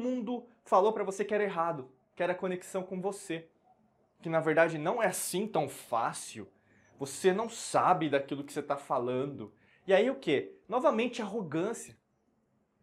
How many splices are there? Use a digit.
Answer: 0